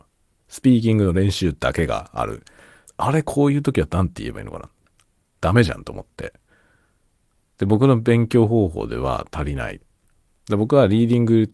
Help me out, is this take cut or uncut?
cut